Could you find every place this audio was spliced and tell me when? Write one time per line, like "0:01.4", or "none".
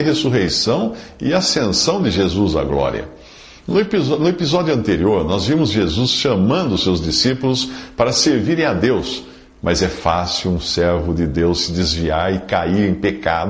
none